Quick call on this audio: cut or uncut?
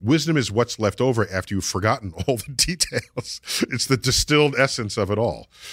uncut